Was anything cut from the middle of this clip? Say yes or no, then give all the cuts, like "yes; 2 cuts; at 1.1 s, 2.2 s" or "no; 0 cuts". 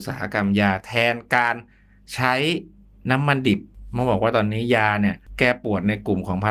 no; 0 cuts